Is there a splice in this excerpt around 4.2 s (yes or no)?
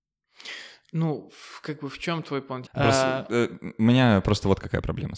no